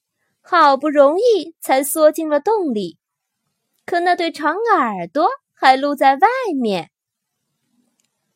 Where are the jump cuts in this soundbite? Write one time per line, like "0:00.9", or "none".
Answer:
none